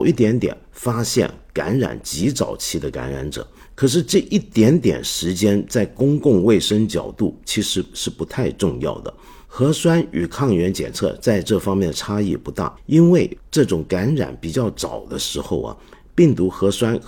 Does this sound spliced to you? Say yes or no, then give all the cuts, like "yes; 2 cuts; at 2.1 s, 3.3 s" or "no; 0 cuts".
yes; 1 cut; at 12.8 s